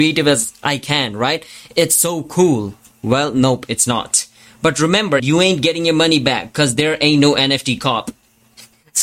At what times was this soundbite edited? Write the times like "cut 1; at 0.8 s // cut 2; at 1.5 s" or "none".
cut 1; at 5.2 s